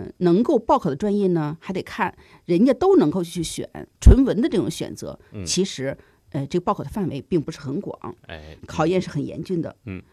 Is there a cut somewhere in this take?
yes; 2 cuts; at 3.9 s, 8.6 s

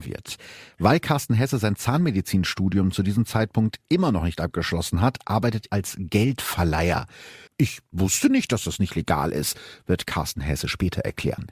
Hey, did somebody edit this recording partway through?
yes; 2 cuts; at 5.7 s, 7.5 s

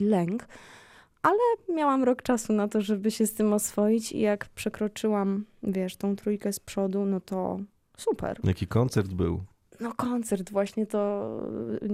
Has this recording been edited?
no; 0 cuts

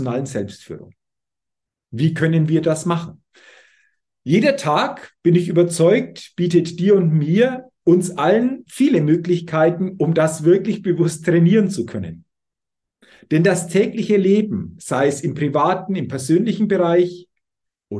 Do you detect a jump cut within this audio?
no; 0 cuts

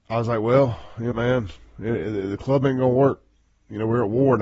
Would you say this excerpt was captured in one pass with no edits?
no; 1 cut; at 1.1 s

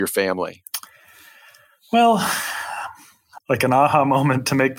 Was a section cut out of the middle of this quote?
yes; 1 cut; at 3.4 s

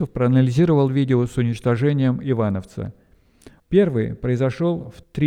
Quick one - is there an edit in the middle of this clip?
yes; 1 cut; at 3.6 s

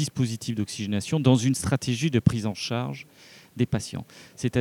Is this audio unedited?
yes; 0 cuts

